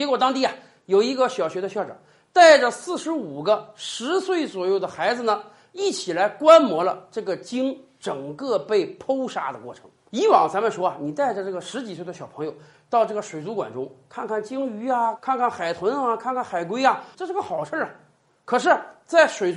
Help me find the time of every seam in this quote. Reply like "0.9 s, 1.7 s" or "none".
15.2 s, 17.1 s